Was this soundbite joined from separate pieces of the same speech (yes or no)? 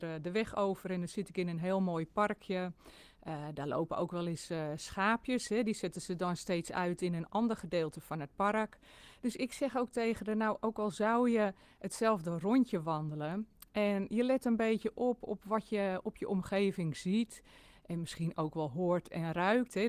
no